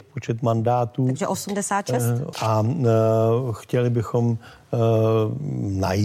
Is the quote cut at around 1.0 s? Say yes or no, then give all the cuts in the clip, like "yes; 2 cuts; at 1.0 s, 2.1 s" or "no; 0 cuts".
no; 1 cut; at 2.3 s